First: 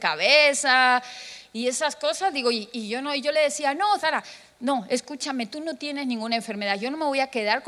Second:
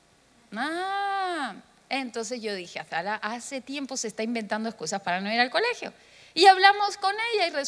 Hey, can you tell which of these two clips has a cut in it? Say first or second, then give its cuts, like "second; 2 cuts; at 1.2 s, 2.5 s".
first; 1 cut; at 4.0 s